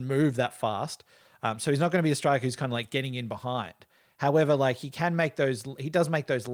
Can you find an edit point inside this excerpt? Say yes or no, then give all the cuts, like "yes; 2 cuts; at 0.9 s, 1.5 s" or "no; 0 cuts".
no; 0 cuts